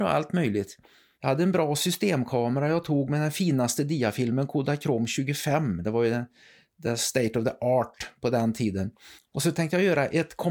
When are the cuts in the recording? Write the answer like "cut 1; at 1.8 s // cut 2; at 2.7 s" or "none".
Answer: cut 1; at 1.1 s // cut 2; at 9.2 s